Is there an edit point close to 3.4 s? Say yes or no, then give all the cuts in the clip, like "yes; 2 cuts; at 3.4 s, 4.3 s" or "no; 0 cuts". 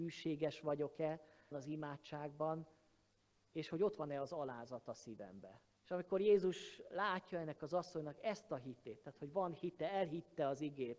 no; 2 cuts; at 1.5 s, 5.8 s